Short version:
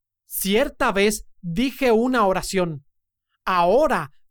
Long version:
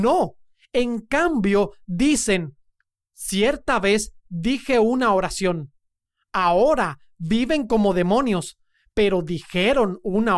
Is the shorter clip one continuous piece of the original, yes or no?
yes